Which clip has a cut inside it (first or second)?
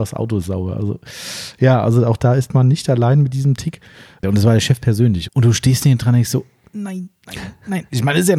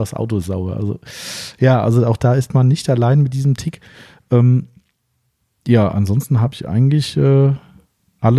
first